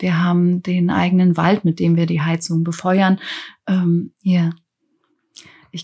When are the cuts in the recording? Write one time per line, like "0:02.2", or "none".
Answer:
0:04.1